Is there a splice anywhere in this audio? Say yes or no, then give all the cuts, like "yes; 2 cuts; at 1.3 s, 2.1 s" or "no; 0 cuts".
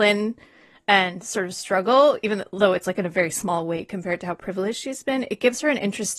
no; 0 cuts